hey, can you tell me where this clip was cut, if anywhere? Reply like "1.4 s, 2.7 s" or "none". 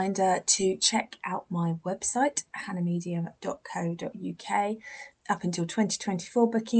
5.1 s